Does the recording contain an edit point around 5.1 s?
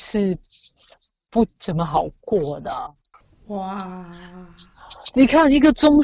no; 1 cut; at 3.1 s

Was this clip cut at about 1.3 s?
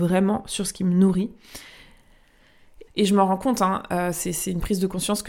no; 1 cut; at 2.9 s

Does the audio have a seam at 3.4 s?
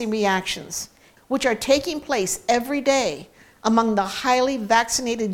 no; 1 cut; at 1.2 s

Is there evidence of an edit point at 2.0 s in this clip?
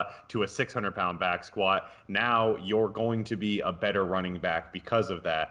no; 0 cuts

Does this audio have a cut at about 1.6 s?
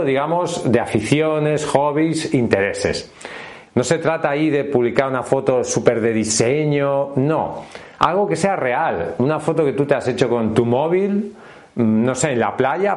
no; 1 cut; at 3.7 s

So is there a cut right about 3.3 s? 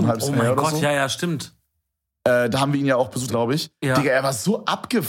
yes; 1 cut; at 3.3 s

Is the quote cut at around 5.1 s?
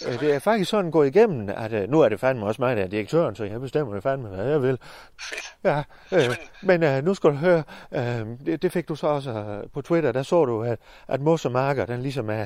yes; 1 cut; at 5.1 s

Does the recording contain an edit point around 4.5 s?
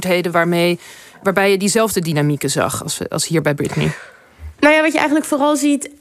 yes; 1 cut; at 4.5 s

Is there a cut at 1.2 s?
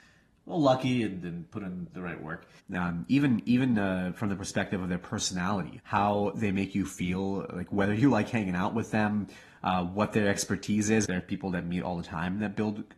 no; 3 cuts; at 2.6 s, 5.8 s, 11.0 s

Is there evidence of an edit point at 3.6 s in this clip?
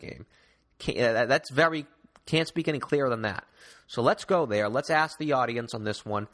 no; 0 cuts

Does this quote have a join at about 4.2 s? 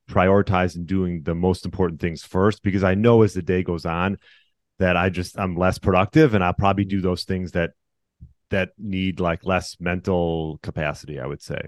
no; 0 cuts

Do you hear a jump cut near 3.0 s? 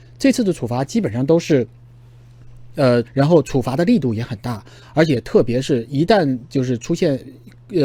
yes; 1 cut; at 3.0 s

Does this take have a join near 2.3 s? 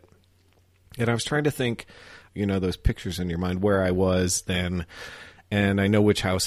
yes; 1 cut; at 2.3 s

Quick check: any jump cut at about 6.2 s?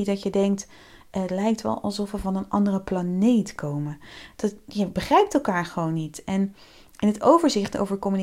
no; 0 cuts

